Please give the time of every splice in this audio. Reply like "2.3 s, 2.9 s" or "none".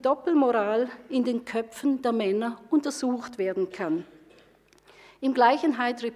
none